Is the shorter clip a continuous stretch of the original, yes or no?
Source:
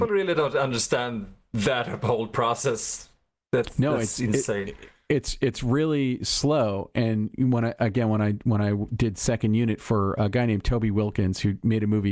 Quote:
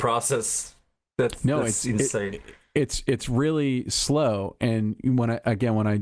yes